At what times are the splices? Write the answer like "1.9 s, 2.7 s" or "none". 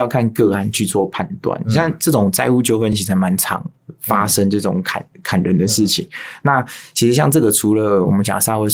none